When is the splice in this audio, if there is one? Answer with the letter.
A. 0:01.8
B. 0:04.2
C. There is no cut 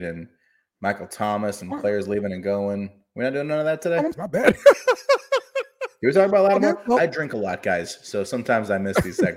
B